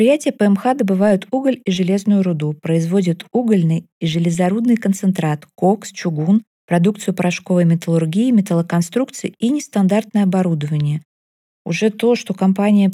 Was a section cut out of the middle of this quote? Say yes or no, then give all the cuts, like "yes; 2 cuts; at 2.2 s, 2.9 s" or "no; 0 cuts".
no; 0 cuts